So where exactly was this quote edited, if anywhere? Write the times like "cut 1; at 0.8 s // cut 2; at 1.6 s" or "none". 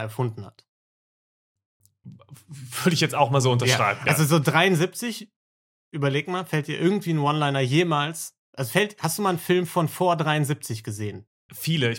none